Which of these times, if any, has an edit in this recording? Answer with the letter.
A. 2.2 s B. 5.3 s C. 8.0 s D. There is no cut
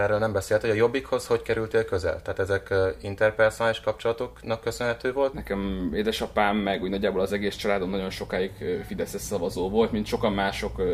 B